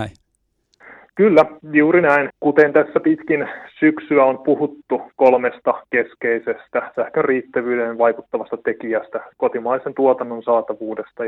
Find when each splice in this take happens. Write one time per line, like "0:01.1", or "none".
0:02.3
0:09.3